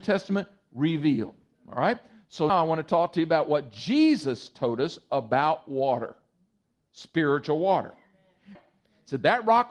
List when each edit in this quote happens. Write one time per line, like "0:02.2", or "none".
0:02.5
0:08.6

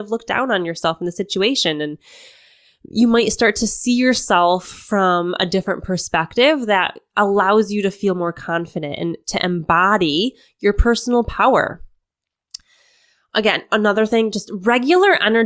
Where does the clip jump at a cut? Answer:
none

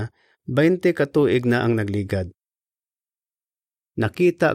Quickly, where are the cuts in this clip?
none

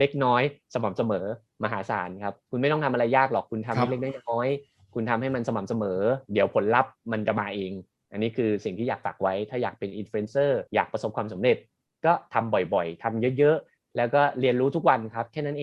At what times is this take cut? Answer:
0:10.7

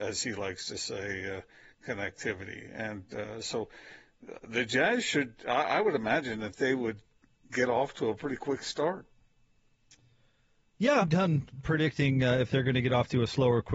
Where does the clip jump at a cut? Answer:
0:11.0

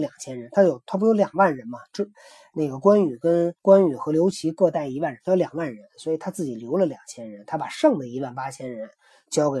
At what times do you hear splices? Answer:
0:03.6

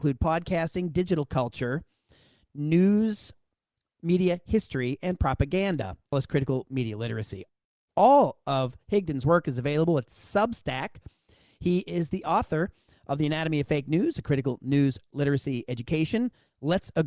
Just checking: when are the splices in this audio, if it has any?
0:06.1

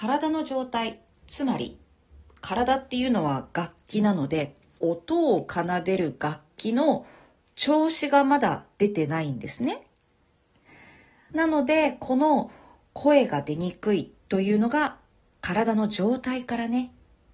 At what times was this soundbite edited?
0:04.8
0:11.3

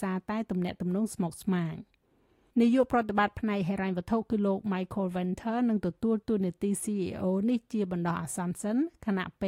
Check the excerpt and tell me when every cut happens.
none

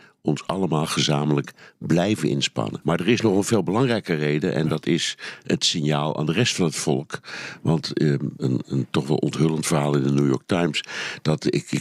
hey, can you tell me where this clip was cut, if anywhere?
0:02.8
0:08.4

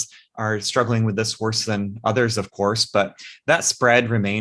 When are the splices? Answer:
none

